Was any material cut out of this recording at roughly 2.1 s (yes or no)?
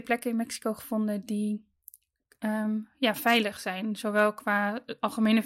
no